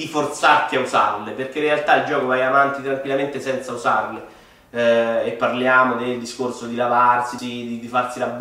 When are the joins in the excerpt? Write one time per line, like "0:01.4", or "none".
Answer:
0:07.4